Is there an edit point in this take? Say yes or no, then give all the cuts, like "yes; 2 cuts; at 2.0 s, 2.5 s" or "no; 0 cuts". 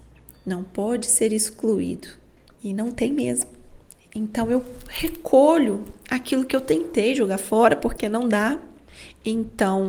yes; 1 cut; at 2.6 s